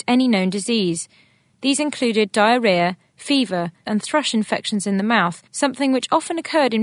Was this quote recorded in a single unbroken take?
no; 2 cuts; at 3.8 s, 5.5 s

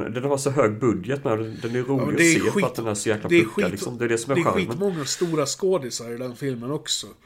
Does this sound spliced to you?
no; 0 cuts

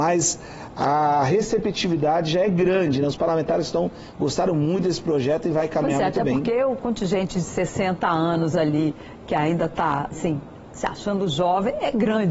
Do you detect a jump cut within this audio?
no; 0 cuts

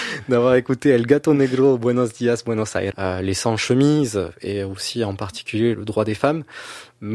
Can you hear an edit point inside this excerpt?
yes; 2 cuts; at 2.9 s, 5.7 s

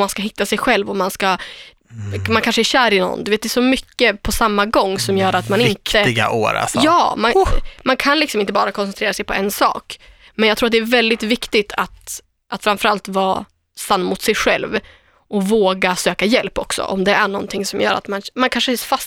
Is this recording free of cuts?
yes; 0 cuts

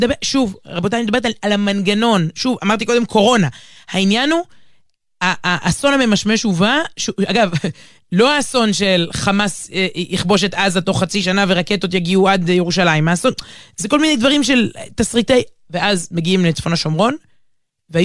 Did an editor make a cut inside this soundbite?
no; 0 cuts

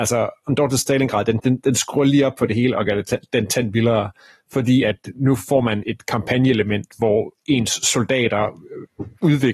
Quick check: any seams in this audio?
yes; 2 cuts; at 1.4 s, 5.8 s

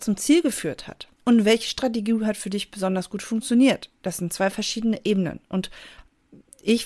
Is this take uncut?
no; 1 cut; at 1.2 s

